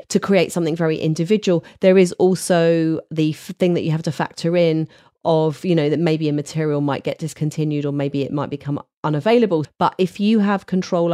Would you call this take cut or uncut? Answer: cut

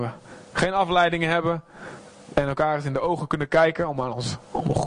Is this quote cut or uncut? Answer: uncut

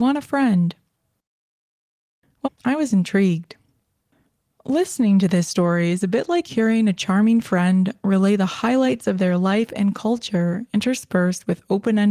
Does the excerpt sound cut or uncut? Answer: cut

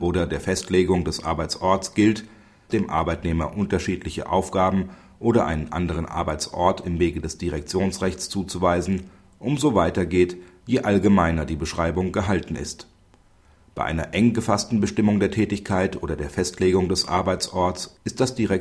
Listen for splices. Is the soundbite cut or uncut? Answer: cut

